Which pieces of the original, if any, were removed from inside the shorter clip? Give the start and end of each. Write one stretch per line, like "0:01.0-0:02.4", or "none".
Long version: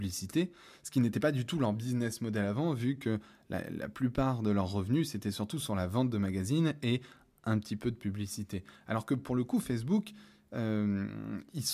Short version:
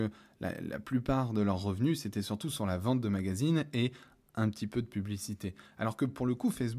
none